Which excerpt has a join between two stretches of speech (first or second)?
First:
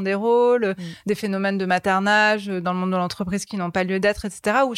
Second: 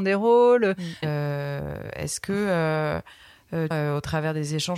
second